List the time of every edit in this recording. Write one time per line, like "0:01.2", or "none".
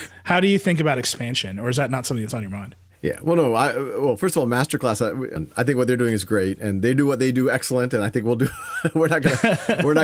0:05.4